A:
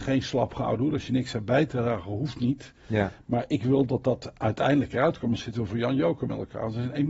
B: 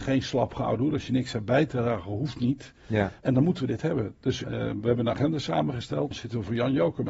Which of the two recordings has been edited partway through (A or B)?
B